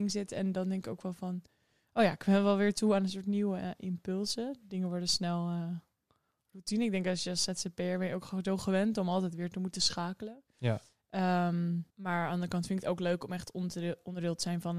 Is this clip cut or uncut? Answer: cut